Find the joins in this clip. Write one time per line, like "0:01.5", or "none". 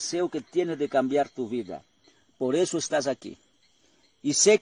none